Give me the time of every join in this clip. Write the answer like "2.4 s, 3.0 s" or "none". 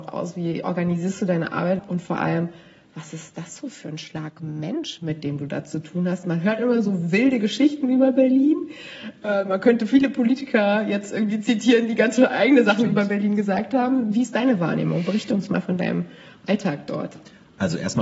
1.8 s